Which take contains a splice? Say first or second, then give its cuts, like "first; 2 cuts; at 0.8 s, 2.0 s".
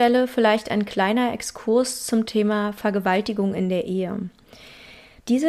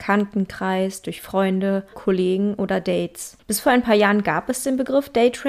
second; 2 cuts; at 1.9 s, 3.4 s